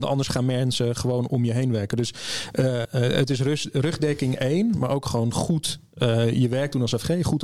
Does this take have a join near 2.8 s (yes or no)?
yes